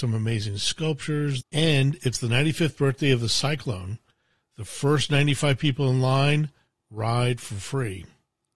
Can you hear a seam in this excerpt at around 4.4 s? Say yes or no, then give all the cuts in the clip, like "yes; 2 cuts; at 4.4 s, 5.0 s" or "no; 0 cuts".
no; 1 cut; at 1.4 s